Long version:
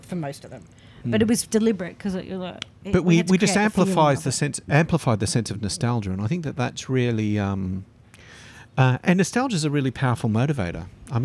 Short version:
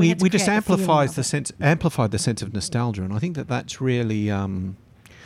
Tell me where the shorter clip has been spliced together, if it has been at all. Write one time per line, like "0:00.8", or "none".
none